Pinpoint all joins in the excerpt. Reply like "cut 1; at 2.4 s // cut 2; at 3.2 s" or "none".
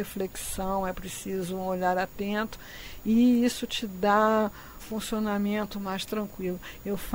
cut 1; at 4.8 s